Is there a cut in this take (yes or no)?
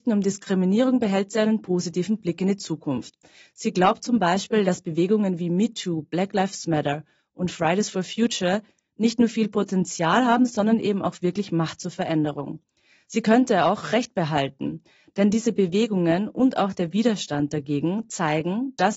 no